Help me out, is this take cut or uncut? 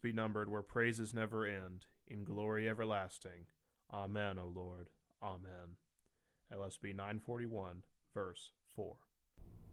uncut